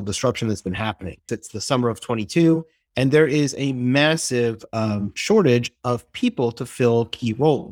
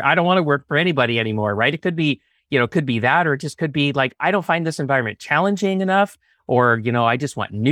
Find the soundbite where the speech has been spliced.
first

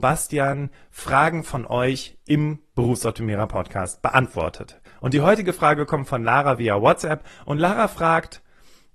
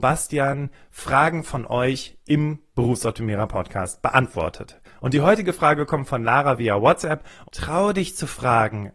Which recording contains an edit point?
second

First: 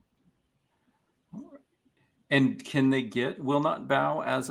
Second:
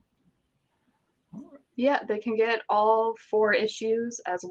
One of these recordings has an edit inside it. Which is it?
second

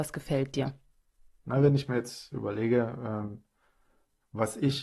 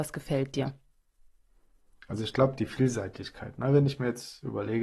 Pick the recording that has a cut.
first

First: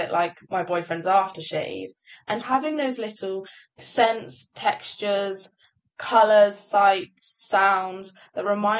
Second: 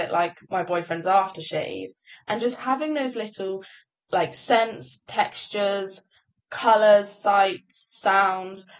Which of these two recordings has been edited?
first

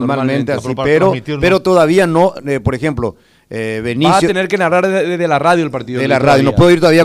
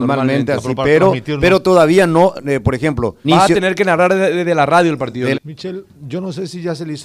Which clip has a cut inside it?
second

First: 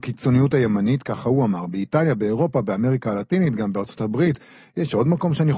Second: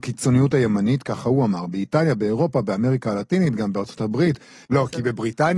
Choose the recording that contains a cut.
second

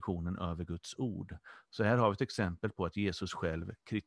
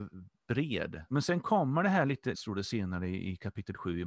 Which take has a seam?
second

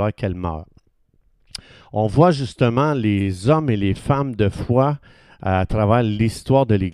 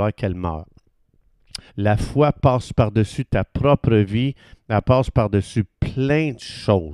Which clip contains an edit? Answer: second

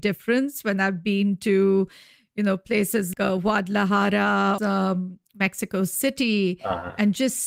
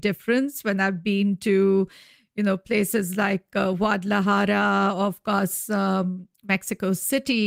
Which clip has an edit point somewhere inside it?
first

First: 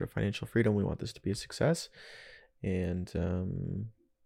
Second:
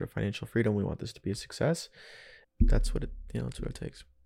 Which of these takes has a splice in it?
second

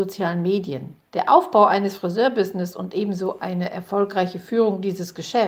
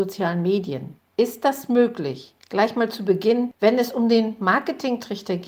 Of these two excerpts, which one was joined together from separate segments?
second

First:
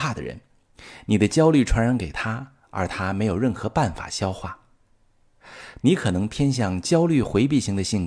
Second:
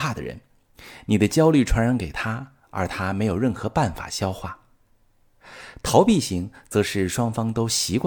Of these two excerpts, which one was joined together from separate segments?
first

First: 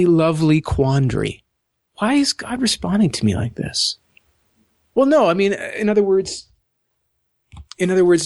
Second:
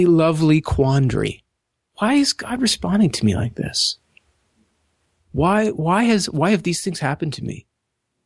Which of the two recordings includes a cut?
first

